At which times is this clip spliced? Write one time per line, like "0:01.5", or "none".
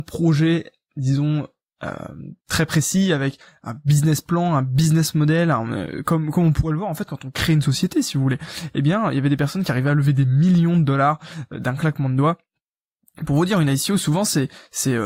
0:02.4